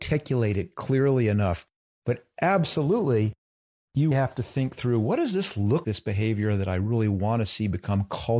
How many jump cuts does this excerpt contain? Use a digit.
2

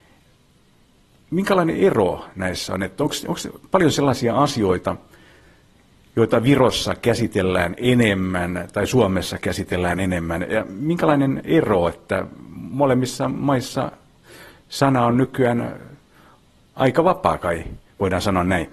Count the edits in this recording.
0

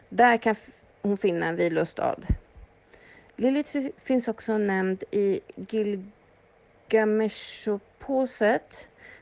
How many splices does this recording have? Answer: 0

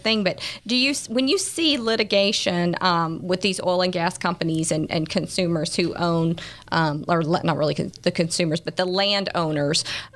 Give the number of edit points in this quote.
0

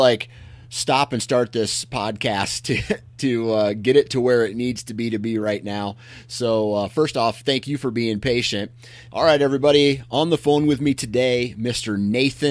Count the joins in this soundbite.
2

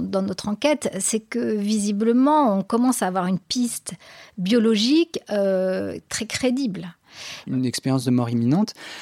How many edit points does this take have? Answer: 1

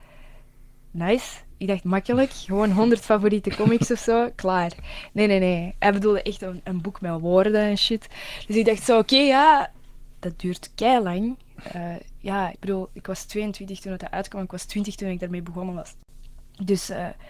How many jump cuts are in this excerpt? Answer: 1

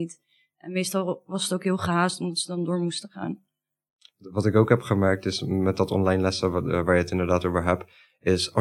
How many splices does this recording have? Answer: 0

